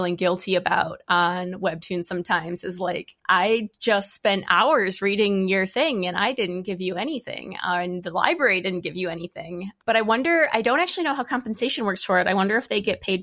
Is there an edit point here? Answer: yes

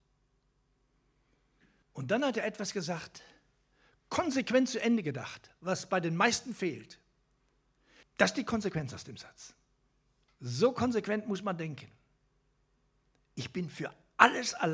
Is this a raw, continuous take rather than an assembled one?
no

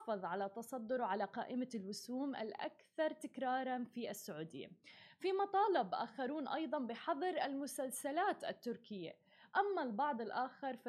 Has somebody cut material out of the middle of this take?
no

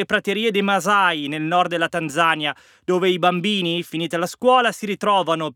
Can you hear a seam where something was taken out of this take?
no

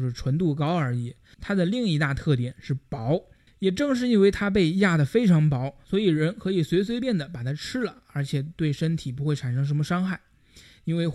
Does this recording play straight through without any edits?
no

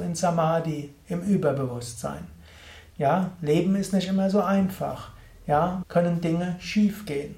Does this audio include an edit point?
yes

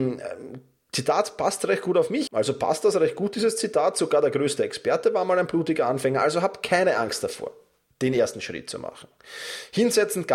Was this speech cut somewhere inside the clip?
yes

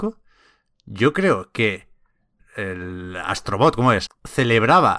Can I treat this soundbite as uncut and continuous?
no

